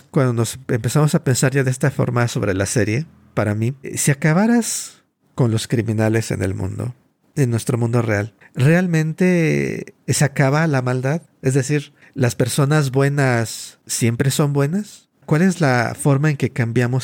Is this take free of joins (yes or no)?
yes